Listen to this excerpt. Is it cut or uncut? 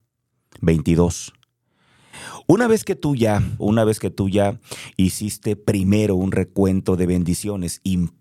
cut